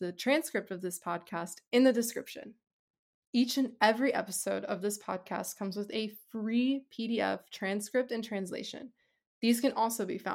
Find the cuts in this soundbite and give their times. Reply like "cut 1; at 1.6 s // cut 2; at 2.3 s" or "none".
cut 1; at 3.2 s